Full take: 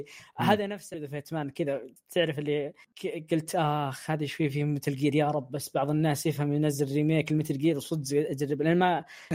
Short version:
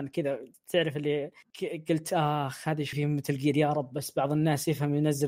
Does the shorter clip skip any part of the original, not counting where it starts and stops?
yes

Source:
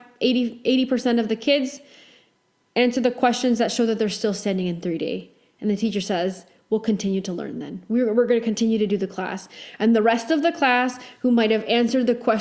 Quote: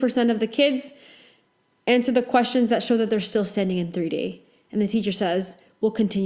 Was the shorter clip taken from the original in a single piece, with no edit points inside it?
yes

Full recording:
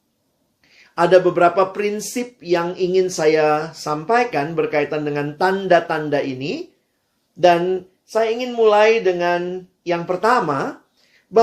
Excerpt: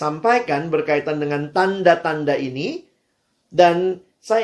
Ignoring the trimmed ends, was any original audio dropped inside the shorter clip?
no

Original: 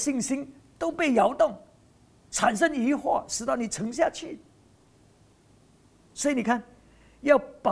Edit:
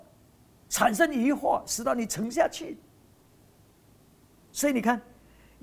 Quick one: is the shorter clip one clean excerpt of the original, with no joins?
yes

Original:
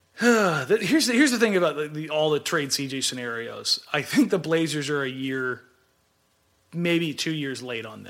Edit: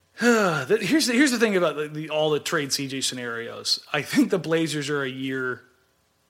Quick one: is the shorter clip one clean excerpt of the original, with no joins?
yes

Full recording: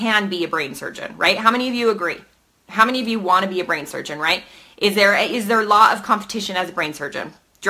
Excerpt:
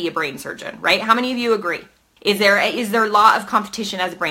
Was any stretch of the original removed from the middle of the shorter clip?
yes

